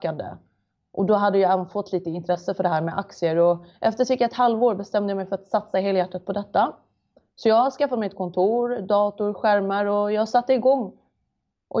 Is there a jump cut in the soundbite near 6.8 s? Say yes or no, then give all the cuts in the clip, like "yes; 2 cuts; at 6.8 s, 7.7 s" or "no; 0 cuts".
no; 0 cuts